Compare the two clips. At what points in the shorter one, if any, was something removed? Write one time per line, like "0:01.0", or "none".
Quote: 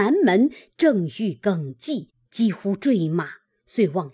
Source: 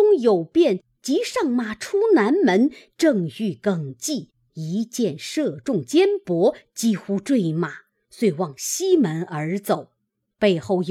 0:02.2